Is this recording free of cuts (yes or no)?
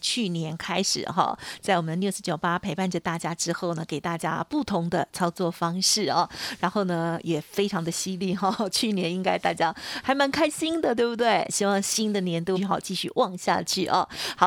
no